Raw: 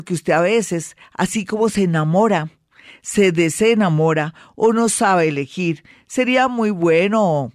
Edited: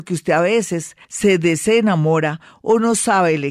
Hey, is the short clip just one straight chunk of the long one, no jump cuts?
no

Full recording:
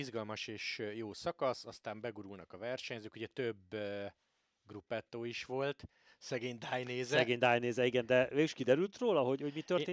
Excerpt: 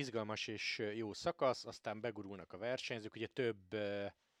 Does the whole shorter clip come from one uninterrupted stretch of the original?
yes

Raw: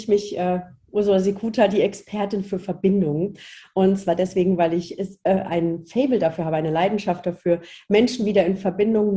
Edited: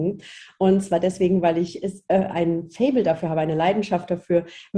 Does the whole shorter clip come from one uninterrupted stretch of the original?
yes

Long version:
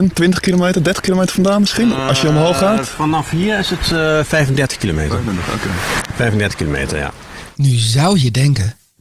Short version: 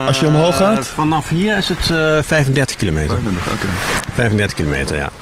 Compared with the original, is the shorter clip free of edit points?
yes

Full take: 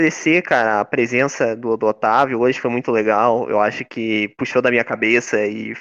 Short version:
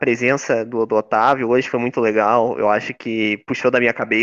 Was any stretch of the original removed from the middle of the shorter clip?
no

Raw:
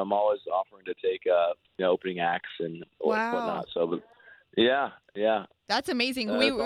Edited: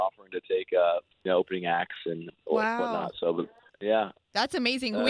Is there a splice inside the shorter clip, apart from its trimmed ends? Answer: yes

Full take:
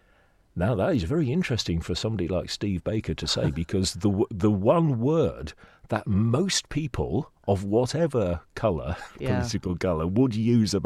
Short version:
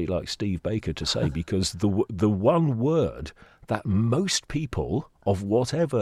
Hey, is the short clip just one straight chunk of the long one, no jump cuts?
yes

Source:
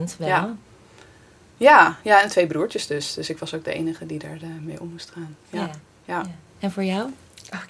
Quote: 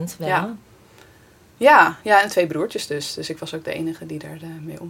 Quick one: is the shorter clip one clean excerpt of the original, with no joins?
yes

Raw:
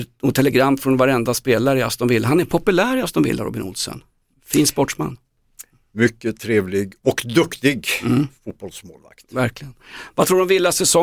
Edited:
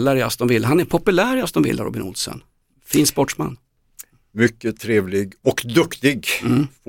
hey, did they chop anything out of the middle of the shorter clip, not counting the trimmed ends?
no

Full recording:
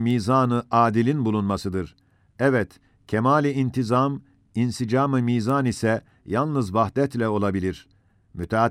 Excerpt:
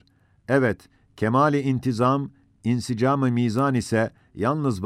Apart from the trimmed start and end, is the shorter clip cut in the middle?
no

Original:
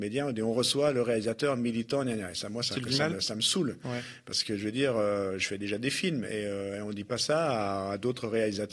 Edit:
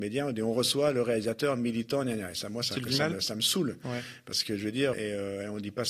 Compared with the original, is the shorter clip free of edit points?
no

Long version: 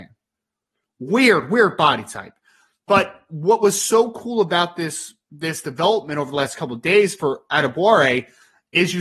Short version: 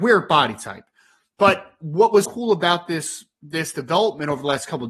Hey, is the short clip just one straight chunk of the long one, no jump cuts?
no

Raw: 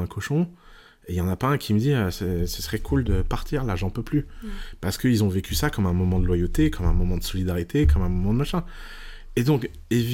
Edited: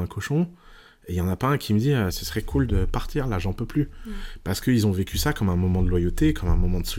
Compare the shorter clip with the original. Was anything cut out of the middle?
yes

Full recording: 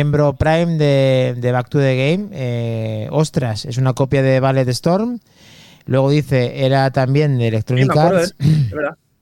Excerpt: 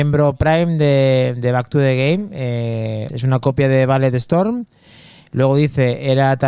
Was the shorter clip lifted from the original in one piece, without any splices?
no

